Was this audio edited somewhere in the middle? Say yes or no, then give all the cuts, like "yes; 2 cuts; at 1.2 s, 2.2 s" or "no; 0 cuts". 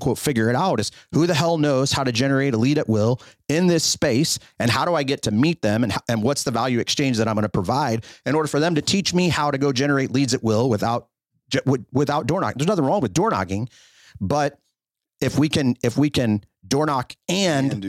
no; 0 cuts